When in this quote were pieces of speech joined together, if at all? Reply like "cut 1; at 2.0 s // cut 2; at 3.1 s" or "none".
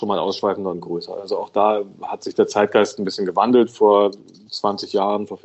none